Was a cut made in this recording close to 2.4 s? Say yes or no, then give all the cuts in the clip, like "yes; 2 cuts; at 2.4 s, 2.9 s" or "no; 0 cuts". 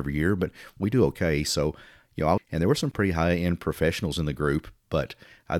yes; 1 cut; at 2.4 s